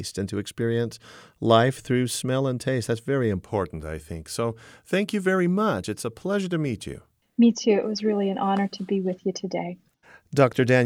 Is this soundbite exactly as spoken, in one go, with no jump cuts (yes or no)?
yes